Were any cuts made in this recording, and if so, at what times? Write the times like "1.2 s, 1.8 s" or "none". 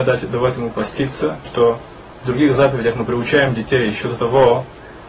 1.4 s